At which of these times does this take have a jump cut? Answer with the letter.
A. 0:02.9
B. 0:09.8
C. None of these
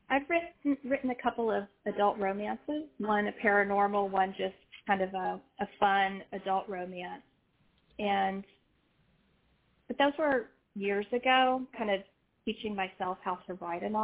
C